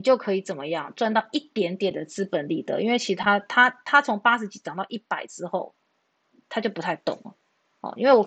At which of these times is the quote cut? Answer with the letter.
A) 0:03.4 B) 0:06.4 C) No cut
C